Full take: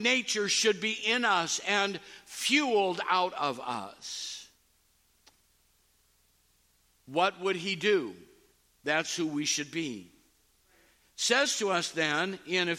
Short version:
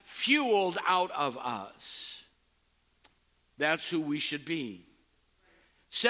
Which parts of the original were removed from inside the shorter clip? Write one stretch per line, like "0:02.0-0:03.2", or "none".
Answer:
0:05.6-0:08.7